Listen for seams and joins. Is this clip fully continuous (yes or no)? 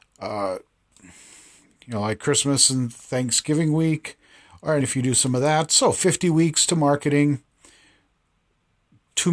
no